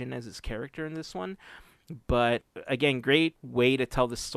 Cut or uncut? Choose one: uncut